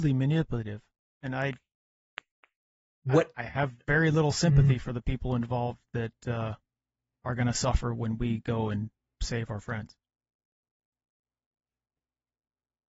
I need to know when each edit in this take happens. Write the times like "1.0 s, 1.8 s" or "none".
none